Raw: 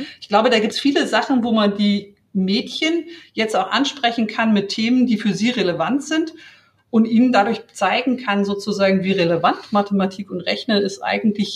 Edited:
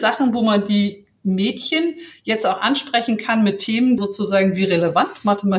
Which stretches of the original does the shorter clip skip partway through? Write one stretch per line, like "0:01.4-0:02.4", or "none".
0:05.1-0:08.5